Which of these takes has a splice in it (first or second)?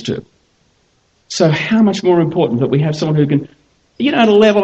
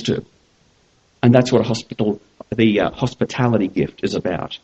second